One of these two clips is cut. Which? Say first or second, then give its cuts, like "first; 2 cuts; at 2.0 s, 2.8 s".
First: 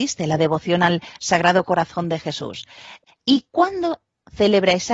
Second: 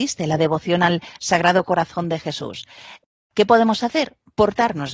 first; 1 cut; at 3.1 s